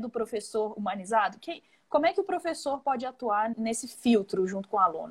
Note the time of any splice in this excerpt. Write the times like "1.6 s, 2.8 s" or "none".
3.5 s